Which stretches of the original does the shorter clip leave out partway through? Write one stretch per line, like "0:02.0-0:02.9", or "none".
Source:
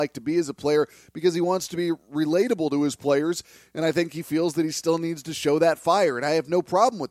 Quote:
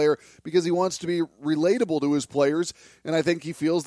none